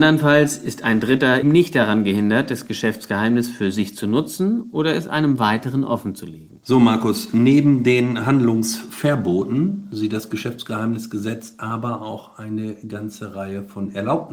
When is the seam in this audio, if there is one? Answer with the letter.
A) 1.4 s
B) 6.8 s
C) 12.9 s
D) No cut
A